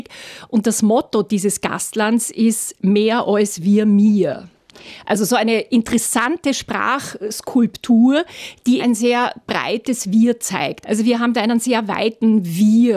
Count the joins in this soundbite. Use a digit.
2